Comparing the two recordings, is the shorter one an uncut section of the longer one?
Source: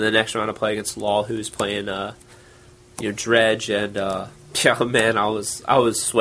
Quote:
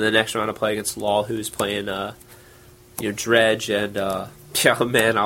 yes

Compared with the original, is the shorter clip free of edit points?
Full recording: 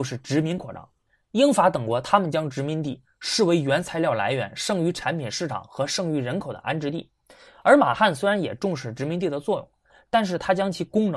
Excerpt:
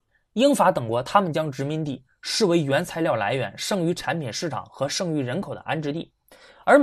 yes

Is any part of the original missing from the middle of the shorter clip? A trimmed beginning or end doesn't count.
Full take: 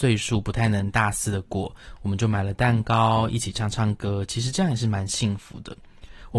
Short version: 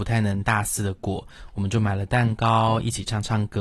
no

